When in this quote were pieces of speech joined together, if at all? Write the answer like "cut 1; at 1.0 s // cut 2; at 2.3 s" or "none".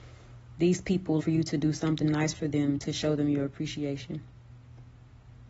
cut 1; at 1.2 s